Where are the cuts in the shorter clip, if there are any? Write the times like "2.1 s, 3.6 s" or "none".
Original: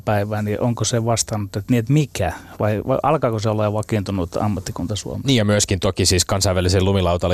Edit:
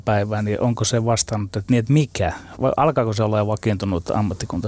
2.6 s